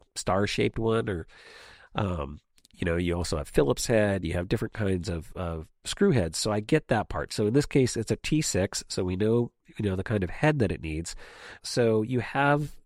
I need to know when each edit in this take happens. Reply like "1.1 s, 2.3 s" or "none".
11.6 s